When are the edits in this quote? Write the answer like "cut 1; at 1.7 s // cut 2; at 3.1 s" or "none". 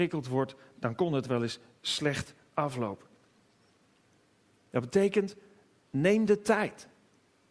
none